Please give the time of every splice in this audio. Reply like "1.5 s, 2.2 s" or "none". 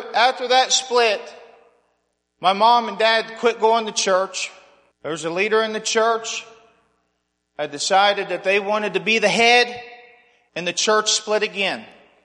4.9 s, 10.5 s